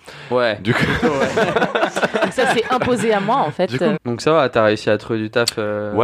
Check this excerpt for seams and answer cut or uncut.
cut